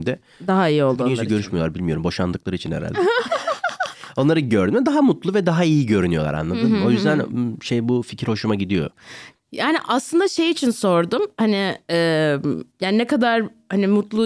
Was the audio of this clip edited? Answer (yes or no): no